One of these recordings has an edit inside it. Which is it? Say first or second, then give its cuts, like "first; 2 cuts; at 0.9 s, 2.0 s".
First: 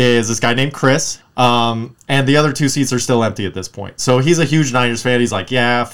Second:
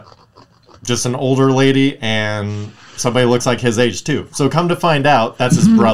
first; 1 cut; at 1.2 s